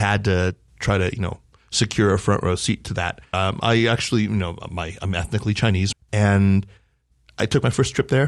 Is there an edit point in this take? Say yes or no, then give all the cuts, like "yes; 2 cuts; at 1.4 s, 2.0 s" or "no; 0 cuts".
yes; 2 cuts; at 3.3 s, 5.9 s